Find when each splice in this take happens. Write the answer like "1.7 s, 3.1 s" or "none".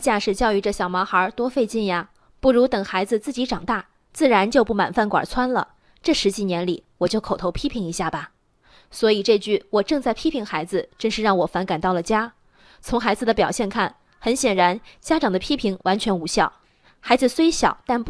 none